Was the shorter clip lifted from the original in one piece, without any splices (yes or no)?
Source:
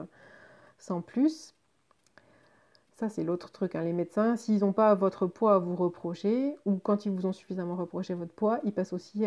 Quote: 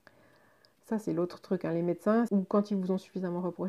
no